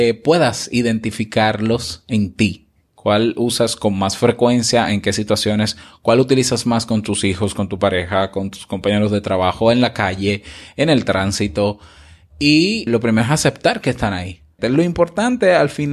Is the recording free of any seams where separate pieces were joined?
no; 2 cuts; at 12.9 s, 14.6 s

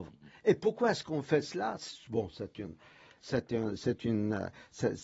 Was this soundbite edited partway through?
no; 0 cuts

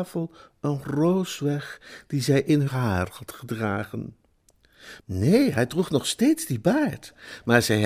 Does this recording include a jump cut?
yes; 2 cuts; at 2.7 s, 5.0 s

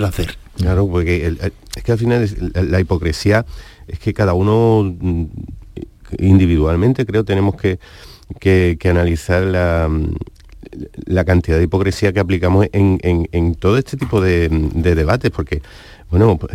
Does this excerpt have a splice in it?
no; 0 cuts

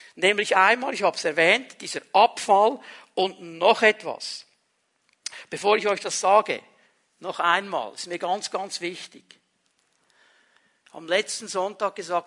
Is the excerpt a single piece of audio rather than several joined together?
yes; 0 cuts

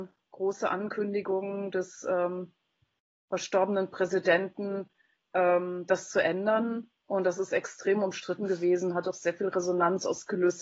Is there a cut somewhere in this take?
no; 0 cuts

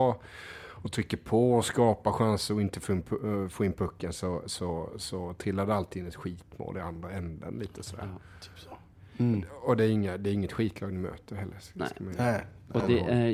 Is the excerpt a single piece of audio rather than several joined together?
yes; 0 cuts

